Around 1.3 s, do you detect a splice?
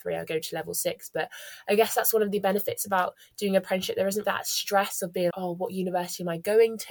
no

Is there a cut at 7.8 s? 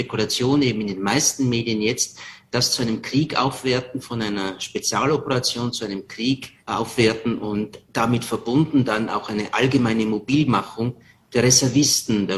yes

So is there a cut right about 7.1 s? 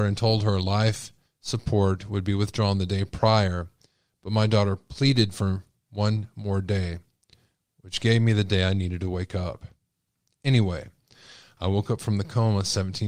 no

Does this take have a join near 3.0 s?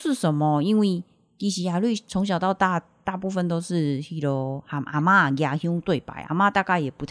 no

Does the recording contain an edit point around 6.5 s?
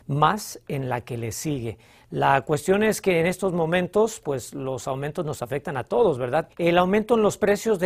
yes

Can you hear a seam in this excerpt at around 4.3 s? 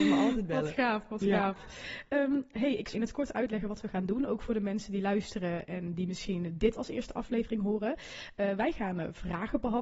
no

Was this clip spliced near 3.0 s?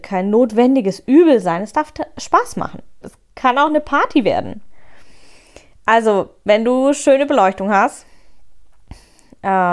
yes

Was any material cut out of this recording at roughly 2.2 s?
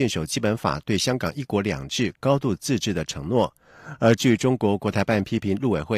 yes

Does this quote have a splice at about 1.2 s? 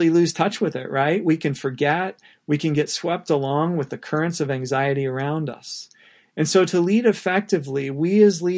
no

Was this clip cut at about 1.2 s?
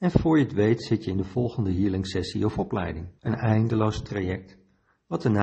no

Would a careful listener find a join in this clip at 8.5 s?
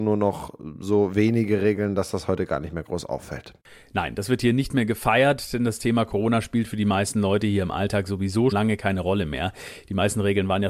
yes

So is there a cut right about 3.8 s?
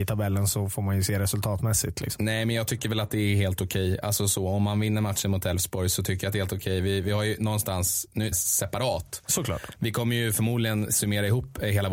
no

